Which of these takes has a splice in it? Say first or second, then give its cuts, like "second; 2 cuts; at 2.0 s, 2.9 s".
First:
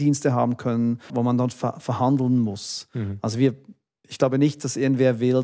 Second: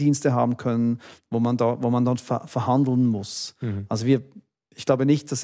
first; 1 cut; at 1.1 s